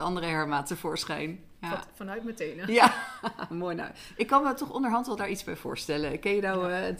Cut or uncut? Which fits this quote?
uncut